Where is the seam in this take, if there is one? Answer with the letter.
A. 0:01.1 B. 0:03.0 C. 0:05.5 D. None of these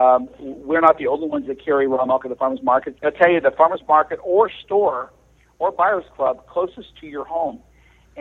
B